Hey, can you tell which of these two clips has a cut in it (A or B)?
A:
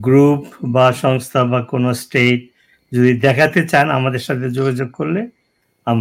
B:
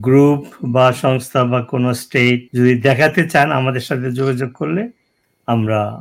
B